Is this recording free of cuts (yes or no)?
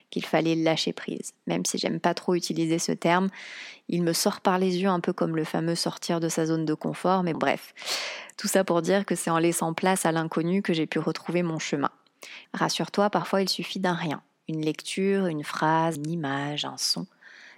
no